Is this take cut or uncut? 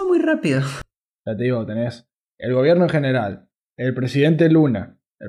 cut